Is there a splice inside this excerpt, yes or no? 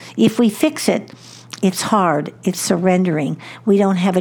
no